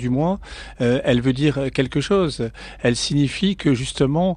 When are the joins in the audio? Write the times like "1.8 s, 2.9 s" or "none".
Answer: none